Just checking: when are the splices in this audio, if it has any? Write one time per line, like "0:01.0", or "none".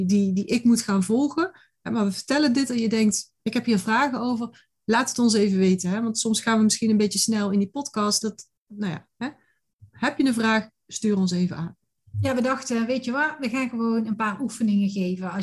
0:03.4
0:08.2
0:12.1